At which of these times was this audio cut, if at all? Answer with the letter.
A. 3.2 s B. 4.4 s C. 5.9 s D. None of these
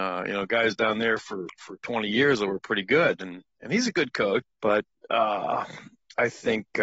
B